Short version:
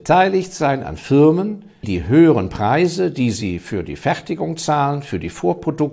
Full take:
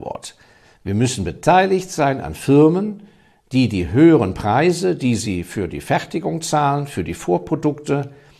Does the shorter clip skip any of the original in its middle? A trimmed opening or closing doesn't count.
yes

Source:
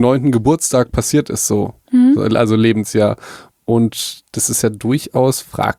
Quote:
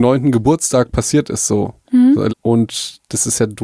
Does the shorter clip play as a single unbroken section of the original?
no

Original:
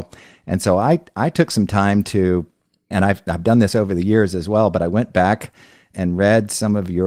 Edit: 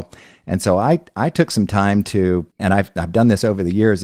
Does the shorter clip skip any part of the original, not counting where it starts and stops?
yes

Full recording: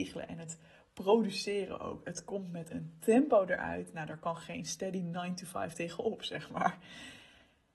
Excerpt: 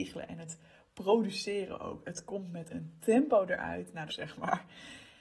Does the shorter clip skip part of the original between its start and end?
yes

